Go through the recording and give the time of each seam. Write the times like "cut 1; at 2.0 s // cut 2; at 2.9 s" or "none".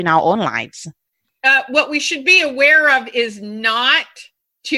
none